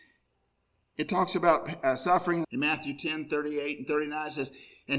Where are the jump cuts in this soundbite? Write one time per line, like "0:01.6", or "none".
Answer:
0:02.4